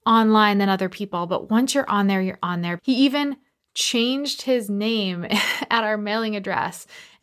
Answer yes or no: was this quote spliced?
yes